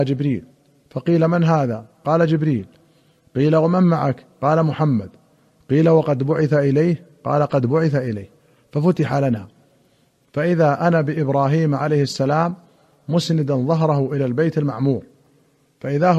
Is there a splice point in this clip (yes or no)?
no